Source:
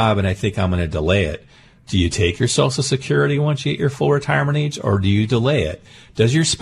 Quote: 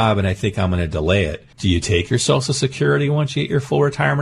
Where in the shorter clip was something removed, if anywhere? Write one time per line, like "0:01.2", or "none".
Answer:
0:01.5